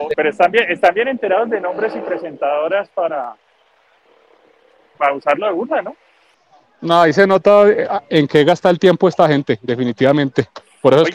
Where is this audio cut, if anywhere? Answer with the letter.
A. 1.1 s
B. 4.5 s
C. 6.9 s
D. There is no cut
D